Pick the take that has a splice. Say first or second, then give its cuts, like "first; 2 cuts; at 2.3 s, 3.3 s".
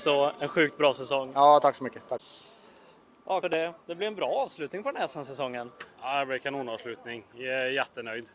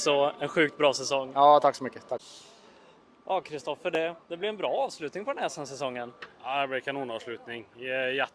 first; 1 cut; at 3.4 s